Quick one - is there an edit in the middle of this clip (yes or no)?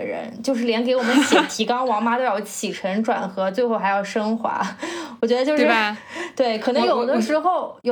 no